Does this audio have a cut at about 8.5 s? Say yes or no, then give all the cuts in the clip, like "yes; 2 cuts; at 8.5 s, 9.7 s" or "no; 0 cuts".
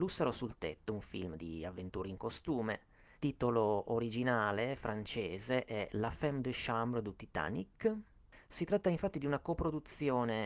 no; 1 cut; at 3.2 s